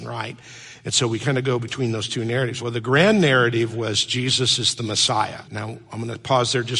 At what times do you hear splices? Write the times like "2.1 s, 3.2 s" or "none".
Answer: 2.6 s, 5.4 s